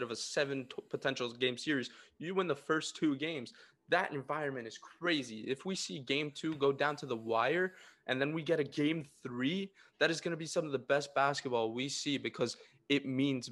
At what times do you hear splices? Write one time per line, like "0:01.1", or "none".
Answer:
none